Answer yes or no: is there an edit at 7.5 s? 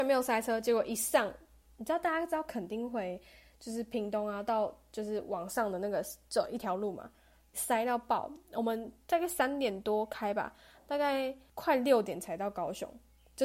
yes